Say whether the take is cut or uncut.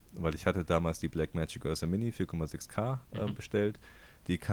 uncut